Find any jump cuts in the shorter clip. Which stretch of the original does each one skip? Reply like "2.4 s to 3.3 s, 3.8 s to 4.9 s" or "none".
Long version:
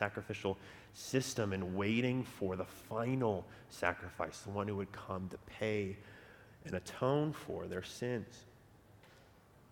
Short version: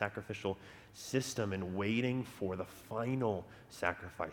none